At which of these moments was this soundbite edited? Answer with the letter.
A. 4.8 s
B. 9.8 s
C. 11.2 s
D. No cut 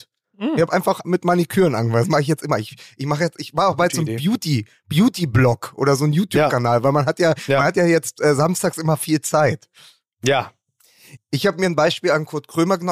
C